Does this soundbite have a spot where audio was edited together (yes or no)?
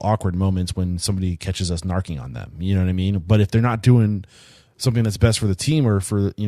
no